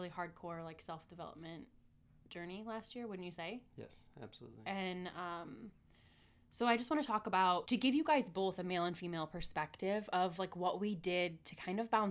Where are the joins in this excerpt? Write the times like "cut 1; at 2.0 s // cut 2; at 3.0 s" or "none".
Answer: cut 1; at 7.6 s